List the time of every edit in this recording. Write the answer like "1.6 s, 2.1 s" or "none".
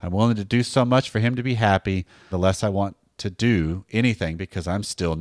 2.3 s

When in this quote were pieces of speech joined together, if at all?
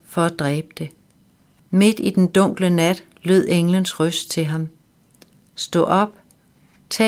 1.6 s

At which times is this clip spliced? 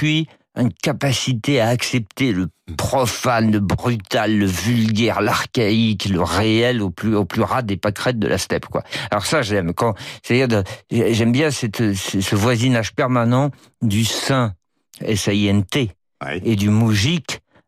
none

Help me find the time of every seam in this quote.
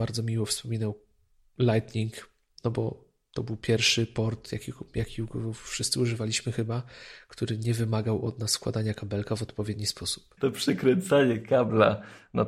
10.4 s

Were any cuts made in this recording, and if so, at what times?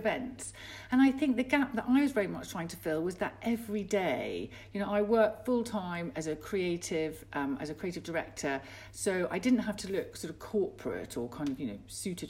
none

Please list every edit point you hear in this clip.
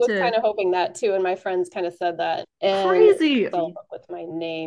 2.4 s, 3.5 s

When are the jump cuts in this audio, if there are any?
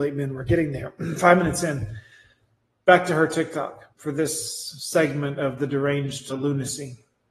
3.9 s, 6.3 s

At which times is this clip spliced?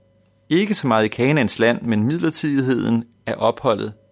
1.8 s

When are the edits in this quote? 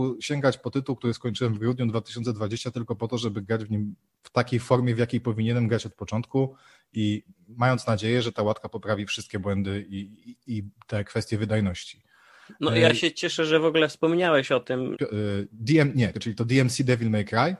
14.9 s, 16.1 s

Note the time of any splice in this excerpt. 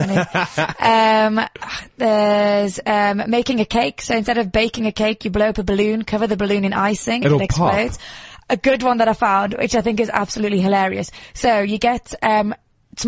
7.2 s

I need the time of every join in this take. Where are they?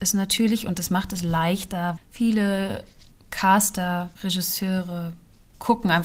2.0 s, 4.1 s

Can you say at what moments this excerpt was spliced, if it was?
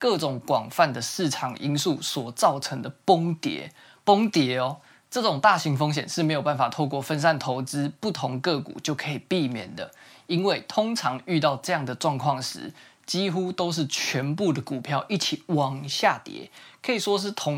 none

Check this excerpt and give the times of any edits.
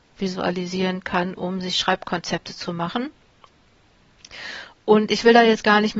none

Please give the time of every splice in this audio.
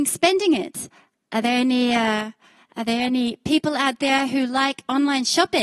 none

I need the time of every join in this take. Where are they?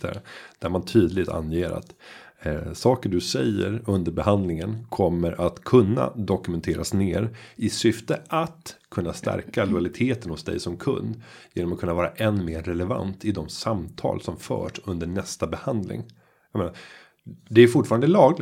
none

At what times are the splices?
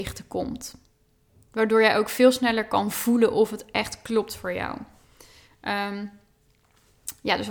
none

